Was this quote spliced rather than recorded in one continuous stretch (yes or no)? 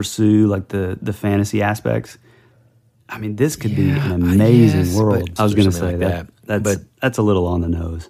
yes